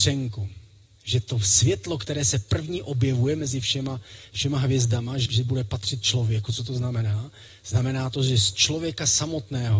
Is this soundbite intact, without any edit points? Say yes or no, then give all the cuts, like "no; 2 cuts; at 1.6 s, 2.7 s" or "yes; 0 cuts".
no; 1 cut; at 5.3 s